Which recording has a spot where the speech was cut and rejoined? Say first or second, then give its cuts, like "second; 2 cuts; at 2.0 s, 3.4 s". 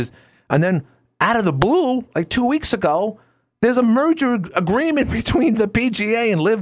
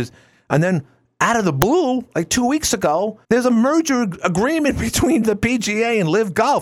second; 1 cut; at 3.2 s